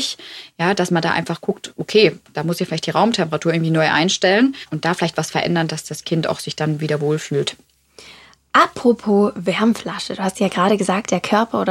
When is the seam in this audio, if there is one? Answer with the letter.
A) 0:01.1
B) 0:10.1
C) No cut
C